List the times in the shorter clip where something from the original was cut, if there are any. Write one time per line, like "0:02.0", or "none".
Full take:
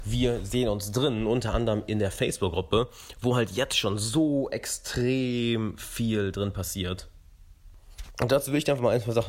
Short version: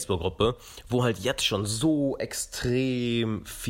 none